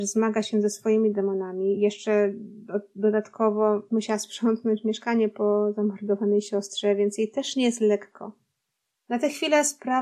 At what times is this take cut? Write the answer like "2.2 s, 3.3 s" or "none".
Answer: none